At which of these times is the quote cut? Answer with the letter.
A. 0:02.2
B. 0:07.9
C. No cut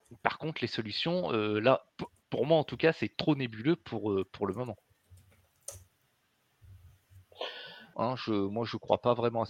B